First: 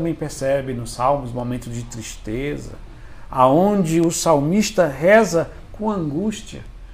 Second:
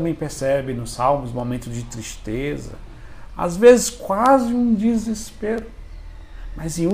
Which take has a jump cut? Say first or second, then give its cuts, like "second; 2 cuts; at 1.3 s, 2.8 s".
second; 1 cut; at 3.3 s